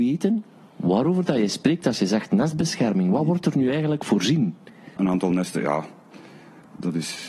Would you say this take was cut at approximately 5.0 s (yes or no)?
yes